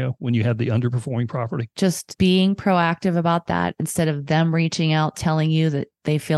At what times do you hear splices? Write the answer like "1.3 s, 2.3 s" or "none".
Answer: 1.7 s